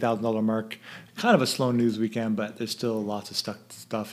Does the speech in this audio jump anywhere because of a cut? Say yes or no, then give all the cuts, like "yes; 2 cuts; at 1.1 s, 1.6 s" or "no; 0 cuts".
yes; 1 cut; at 1.1 s